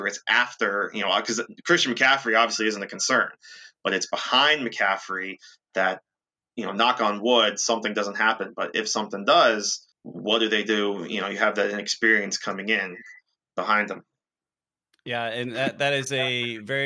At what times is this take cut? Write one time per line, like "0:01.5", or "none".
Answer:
0:09.9